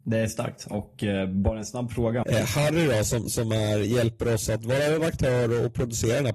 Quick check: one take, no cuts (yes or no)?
no